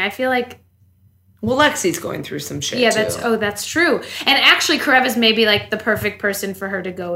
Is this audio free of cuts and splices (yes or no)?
yes